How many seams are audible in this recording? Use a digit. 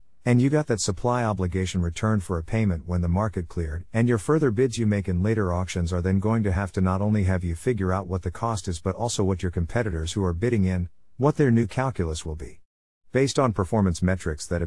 0